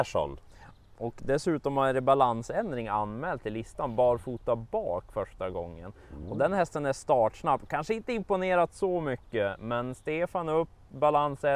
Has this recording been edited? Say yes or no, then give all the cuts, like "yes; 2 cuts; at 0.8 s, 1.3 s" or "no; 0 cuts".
no; 0 cuts